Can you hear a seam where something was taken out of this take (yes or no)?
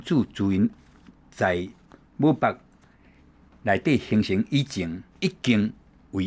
yes